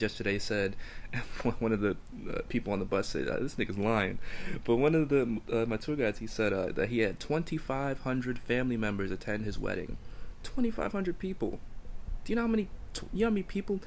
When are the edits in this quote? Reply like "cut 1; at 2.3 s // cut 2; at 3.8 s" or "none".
none